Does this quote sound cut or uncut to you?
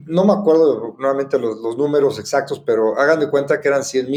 uncut